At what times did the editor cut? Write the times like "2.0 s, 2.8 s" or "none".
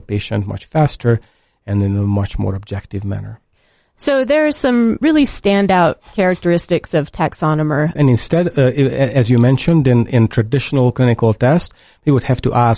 5.0 s, 8.0 s